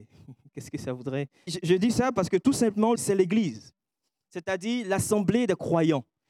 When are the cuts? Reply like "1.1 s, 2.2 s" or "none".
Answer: 1.5 s, 2.9 s